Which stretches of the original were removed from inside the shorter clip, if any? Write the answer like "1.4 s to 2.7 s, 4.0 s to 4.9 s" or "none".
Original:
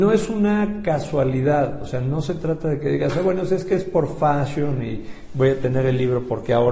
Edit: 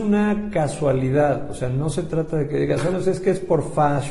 3.2 s to 3.4 s